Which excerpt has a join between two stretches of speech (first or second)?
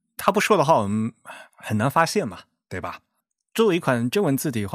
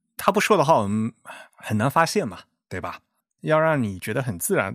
second